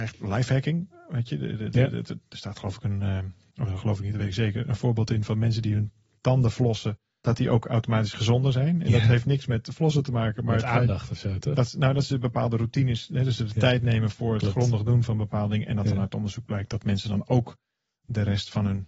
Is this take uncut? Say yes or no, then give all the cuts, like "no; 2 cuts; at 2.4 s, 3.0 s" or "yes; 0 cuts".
yes; 0 cuts